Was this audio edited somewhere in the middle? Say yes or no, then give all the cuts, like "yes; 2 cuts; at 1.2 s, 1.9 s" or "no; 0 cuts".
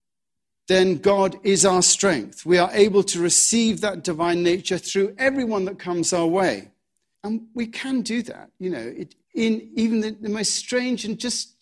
yes; 2 cuts; at 7.1 s, 9.2 s